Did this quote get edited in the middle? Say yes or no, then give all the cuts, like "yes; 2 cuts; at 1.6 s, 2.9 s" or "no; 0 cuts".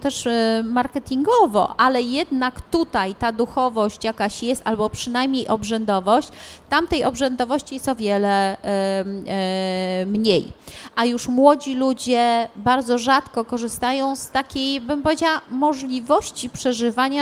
yes; 1 cut; at 8.0 s